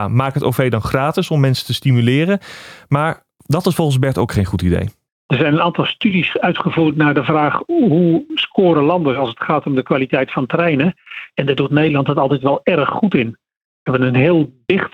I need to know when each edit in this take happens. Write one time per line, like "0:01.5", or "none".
0:05.1